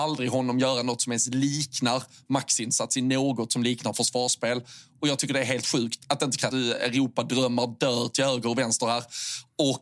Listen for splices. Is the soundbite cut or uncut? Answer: cut